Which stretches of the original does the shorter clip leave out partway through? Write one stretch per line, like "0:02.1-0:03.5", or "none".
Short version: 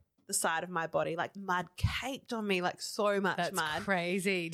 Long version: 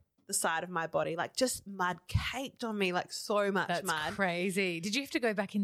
0:01.3-0:01.6